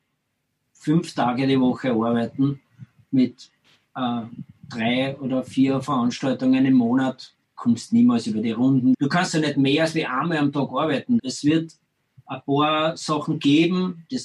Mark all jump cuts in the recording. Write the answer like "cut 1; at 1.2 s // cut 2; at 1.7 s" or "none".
cut 1; at 8.9 s // cut 2; at 11.2 s